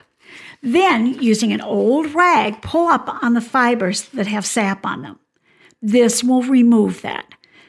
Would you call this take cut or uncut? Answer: uncut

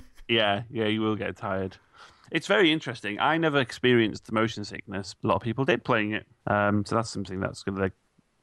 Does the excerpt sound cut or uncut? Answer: cut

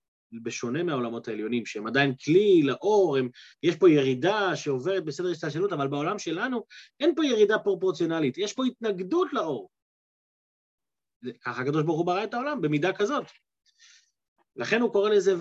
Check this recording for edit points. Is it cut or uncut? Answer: uncut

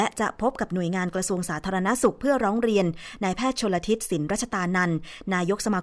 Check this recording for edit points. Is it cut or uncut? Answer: uncut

